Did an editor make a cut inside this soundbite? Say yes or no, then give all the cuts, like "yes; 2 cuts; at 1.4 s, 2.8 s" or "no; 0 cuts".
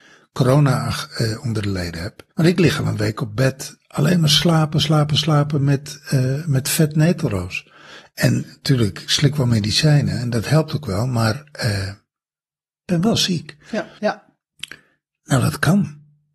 yes; 2 cuts; at 2.3 s, 14.0 s